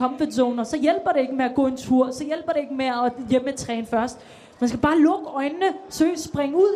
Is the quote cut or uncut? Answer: uncut